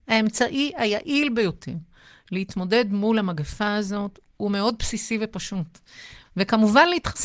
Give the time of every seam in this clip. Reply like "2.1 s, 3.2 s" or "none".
6.2 s